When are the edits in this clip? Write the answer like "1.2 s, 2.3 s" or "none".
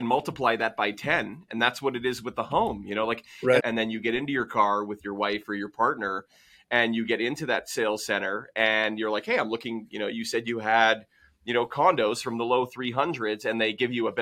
3.6 s